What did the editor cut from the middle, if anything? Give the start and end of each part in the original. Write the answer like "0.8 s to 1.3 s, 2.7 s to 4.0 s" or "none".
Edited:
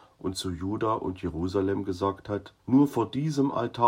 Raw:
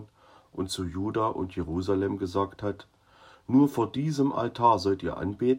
2.9 s to 3.4 s